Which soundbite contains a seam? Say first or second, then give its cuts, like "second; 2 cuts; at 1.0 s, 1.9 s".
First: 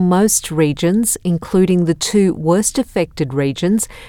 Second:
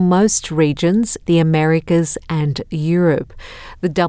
second; 1 cut; at 1.2 s